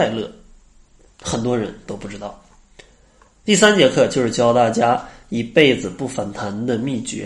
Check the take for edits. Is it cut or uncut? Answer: uncut